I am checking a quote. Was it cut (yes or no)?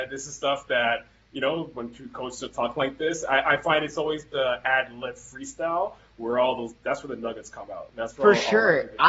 no